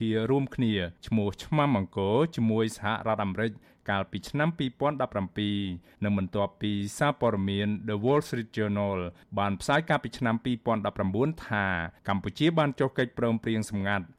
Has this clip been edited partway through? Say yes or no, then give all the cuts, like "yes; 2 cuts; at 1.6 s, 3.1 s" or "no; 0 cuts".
no; 0 cuts